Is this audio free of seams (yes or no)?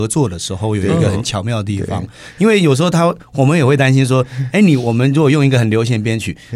yes